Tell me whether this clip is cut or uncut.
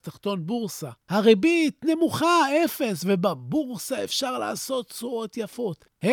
cut